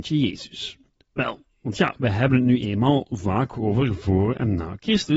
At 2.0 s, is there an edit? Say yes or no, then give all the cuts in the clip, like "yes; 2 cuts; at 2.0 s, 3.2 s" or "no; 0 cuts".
no; 0 cuts